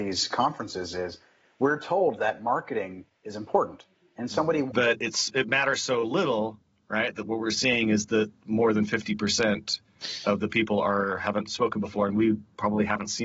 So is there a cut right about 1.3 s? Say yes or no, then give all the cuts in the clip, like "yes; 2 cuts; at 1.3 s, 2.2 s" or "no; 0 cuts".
no; 1 cut; at 4.7 s